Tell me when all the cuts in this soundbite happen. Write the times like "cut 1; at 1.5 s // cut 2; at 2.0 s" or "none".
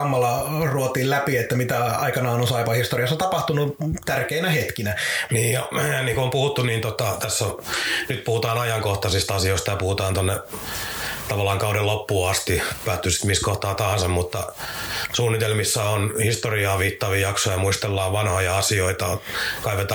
cut 1; at 5.3 s